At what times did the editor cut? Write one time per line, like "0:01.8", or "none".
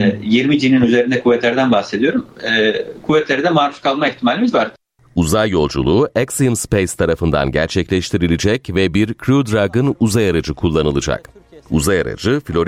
none

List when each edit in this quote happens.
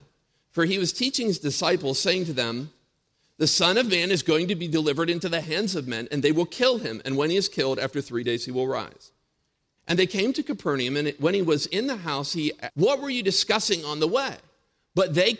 0:09.8
0:12.7

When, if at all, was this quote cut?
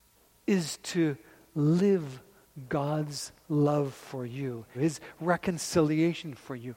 0:04.7

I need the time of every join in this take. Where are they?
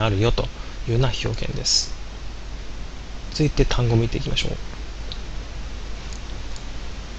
0:03.3

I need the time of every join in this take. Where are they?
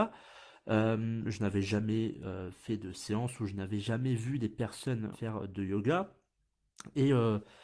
0:05.1

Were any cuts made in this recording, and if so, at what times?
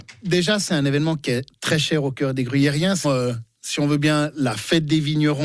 0:03.0

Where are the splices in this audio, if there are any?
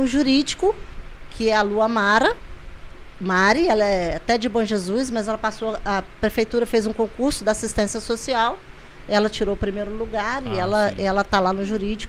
none

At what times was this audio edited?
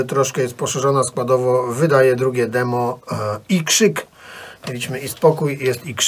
none

